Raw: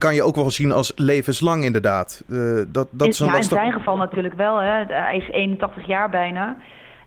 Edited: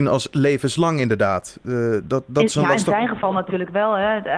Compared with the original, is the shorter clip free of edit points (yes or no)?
yes